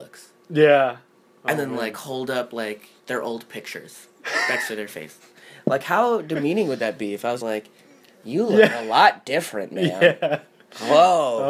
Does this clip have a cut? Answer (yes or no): yes